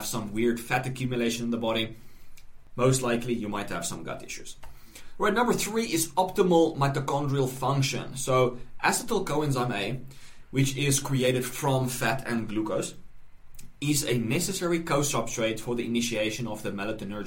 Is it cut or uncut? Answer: uncut